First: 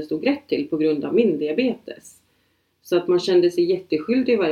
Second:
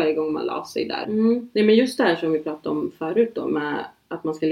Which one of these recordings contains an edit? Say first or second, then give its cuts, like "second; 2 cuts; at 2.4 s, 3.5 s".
second; 1 cut; at 1.0 s